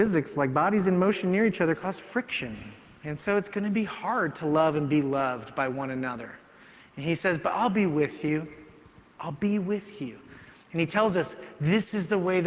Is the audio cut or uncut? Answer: uncut